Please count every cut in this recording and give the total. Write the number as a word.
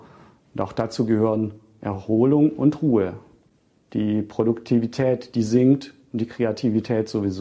one